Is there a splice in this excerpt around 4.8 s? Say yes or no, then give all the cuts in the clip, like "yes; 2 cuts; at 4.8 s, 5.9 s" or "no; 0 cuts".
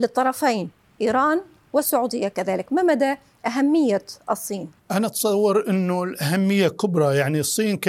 yes; 1 cut; at 4.8 s